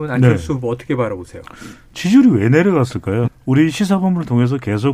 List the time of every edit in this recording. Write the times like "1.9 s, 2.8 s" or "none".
3.3 s